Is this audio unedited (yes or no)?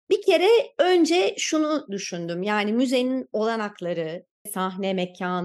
no